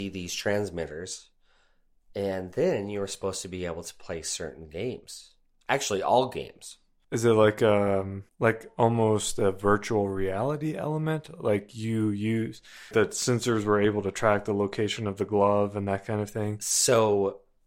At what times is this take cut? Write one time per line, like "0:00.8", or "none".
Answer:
0:07.0
0:08.3
0:12.9